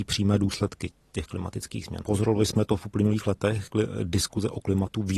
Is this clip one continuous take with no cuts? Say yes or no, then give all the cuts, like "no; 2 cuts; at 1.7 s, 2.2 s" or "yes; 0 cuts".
no; 2 cuts; at 2.0 s, 3.7 s